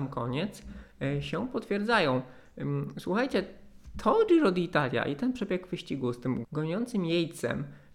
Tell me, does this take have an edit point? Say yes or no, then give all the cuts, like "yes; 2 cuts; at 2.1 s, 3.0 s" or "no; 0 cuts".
yes; 1 cut; at 6.4 s